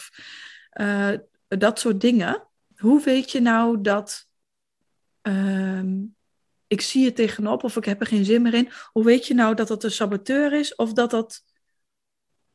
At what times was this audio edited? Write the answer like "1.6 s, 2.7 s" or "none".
2.7 s